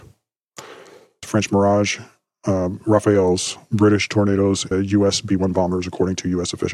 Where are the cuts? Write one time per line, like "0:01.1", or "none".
0:01.2
0:04.7